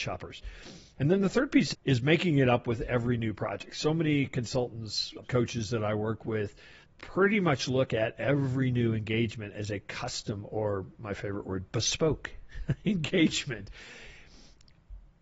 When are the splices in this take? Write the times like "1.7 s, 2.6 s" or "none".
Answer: 5.2 s, 6.8 s